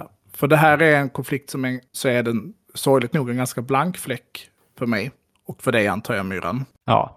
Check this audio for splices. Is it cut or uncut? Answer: cut